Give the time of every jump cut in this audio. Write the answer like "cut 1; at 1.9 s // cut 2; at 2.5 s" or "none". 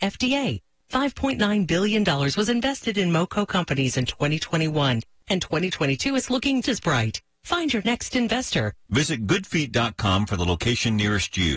cut 1; at 6.6 s // cut 2; at 8.9 s